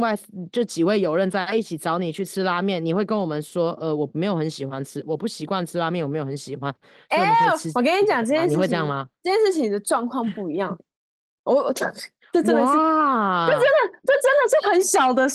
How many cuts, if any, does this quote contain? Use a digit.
1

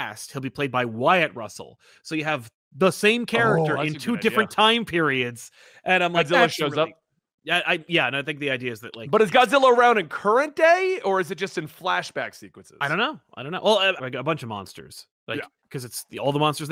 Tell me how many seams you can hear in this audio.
1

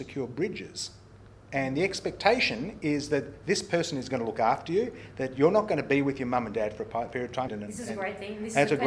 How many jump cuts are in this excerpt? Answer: 1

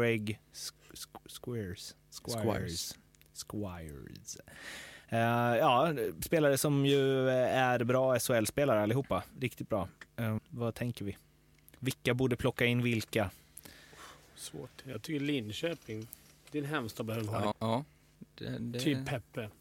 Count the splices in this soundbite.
2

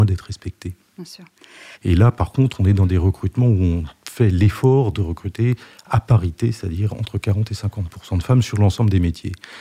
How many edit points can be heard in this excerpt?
1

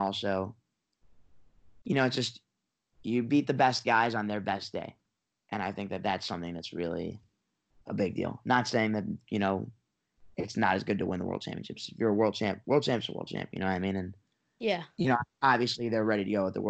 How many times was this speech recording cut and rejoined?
0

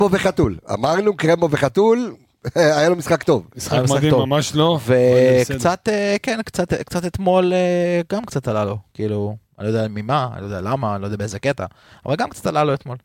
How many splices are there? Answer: 0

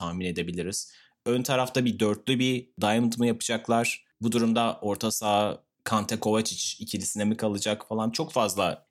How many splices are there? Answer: 0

